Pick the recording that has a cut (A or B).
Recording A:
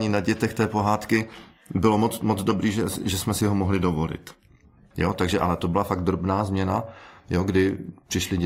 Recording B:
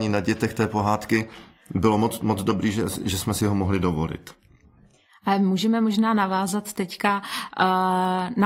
A